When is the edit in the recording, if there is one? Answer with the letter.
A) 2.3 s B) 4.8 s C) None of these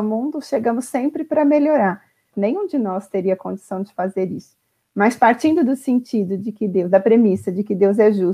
A